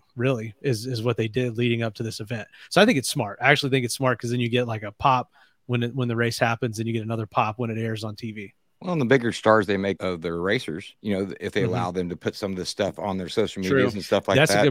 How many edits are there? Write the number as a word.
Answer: one